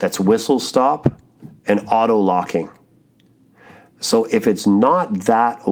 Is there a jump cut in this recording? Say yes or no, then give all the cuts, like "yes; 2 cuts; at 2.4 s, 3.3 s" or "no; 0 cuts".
no; 0 cuts